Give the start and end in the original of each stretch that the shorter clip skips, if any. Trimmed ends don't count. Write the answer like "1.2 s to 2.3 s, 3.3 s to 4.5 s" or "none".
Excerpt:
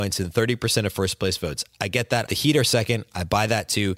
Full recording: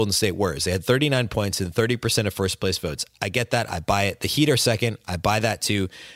3.7 s to 4.2 s

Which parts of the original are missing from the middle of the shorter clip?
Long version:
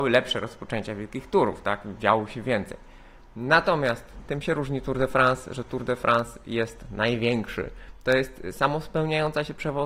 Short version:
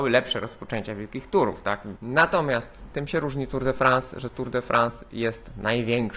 2.0 s to 3.3 s

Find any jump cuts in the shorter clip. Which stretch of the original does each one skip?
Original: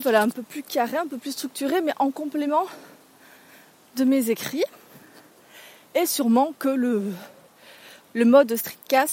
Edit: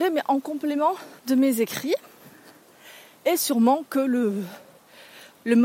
2.9 s to 3.9 s

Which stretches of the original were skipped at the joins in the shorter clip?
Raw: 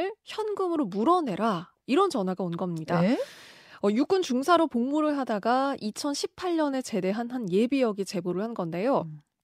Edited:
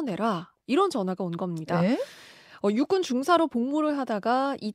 none

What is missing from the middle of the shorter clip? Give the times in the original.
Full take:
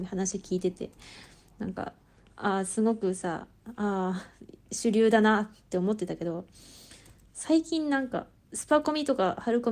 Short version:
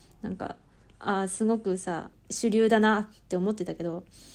3.5 s to 4.5 s

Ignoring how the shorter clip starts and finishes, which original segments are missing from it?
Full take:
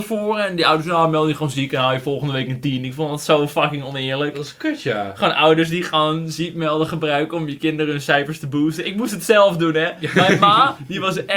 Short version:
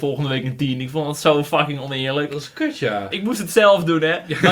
5.1 s to 8.8 s

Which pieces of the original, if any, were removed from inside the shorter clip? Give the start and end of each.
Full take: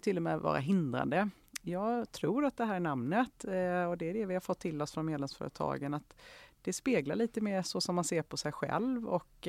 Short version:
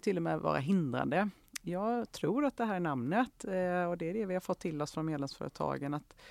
none

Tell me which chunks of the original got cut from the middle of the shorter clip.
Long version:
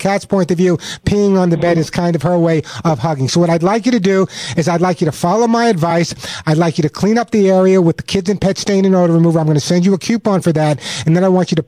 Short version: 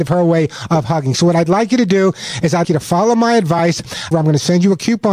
4.8 s to 5.0 s, 6.4 s to 9.3 s

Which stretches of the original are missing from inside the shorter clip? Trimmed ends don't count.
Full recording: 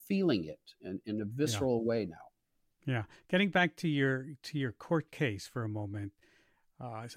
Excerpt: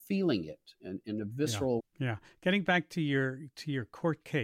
1.8 s to 2.7 s

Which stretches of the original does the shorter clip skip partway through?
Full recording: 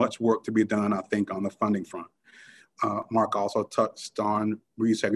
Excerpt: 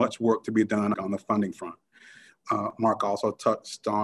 0.9 s to 1.3 s

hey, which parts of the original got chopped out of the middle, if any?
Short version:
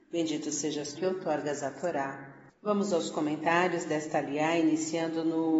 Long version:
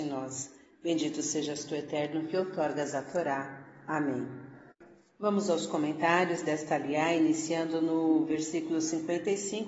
1.7 s to 2.3 s, 3.8 s to 5.1 s

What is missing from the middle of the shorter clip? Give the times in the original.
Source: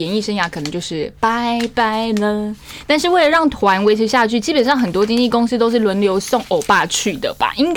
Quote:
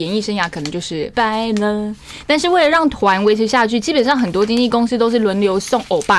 1.1 s to 1.7 s

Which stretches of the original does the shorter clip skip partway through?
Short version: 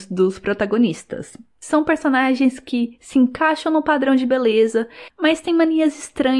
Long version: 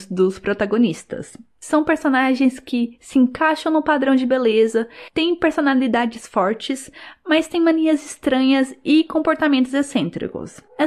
5.1 s to 7.2 s

